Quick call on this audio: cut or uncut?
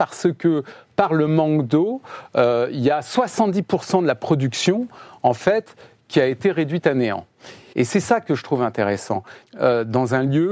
cut